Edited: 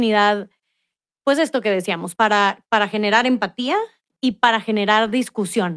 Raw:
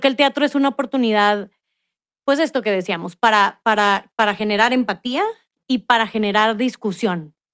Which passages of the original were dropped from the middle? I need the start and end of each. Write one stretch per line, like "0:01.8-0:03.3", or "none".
0:03.2-0:03.6